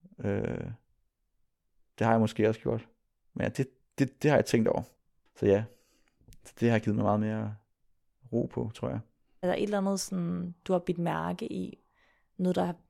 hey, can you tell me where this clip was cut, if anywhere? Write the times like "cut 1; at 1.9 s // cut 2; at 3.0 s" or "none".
cut 1; at 5.3 s